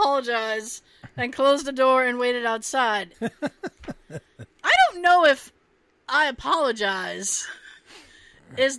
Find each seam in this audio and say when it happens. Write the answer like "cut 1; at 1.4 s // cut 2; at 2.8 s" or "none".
cut 1; at 3.1 s